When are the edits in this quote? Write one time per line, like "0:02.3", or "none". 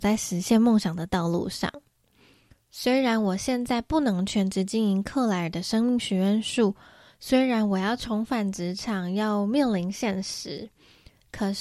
none